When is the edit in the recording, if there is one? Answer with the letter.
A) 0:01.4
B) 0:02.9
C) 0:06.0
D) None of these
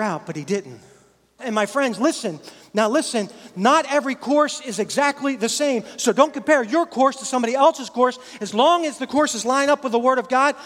A